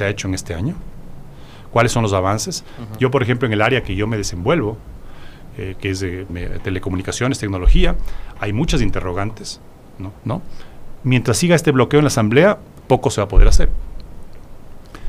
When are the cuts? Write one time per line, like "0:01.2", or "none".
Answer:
0:06.3
0:10.1
0:12.8